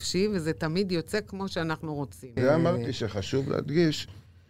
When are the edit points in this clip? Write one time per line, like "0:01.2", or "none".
0:02.4